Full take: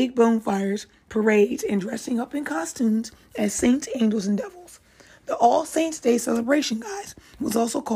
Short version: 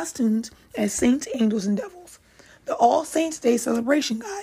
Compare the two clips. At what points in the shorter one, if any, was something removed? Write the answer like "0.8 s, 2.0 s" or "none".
none